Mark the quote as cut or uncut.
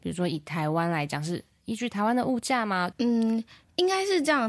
cut